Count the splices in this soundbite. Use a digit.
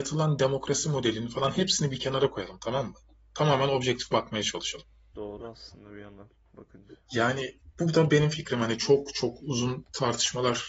2